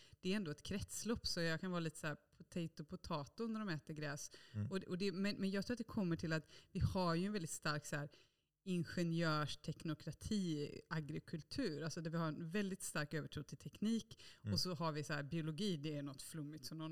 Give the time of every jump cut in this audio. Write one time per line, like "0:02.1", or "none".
none

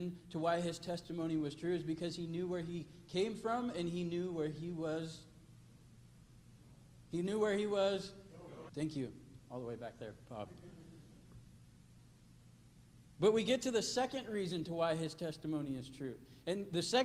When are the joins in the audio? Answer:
0:08.7

